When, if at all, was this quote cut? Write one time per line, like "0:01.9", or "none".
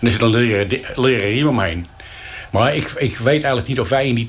0:02.5